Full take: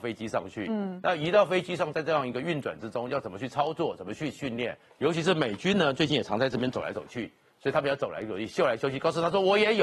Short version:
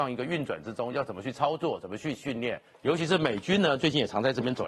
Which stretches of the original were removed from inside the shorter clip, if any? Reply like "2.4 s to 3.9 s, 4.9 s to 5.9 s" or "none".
none

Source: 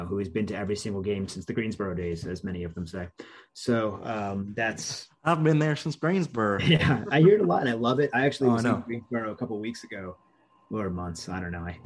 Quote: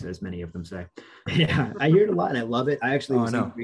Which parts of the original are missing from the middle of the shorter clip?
3.5 s to 6.6 s

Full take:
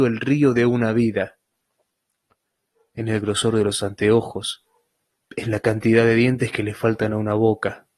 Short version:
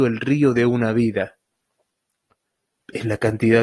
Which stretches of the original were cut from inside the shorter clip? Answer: 2.7 s to 5.2 s

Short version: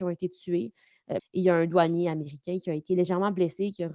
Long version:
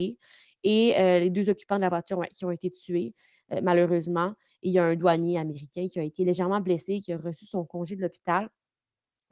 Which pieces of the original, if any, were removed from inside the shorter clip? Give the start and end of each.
3.6 s to 4.5 s

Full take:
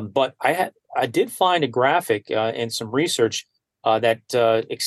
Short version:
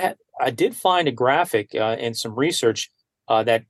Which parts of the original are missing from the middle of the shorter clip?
none

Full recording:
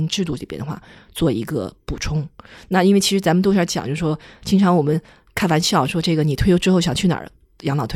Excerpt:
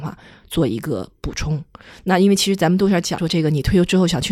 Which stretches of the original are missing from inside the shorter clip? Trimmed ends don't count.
3.8 s to 5.9 s

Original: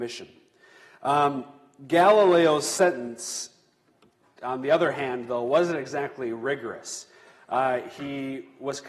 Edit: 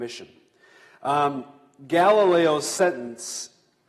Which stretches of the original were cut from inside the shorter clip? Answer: none

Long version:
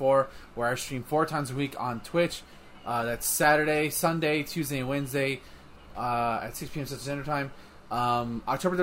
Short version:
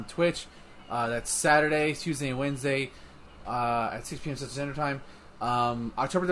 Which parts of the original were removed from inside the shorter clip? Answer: 3.9 s to 4.4 s

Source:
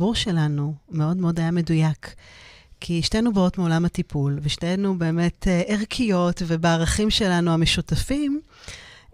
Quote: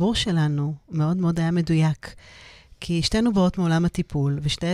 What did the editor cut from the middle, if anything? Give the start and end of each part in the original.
none

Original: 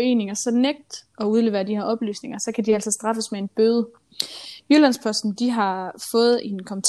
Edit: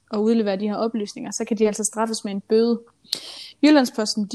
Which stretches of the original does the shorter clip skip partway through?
none

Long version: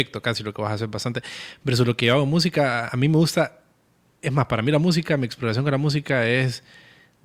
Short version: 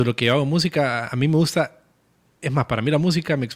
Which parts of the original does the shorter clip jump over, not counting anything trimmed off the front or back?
none

